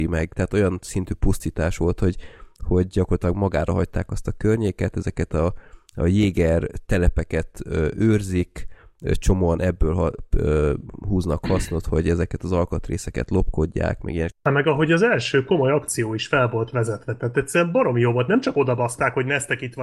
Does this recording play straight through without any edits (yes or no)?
no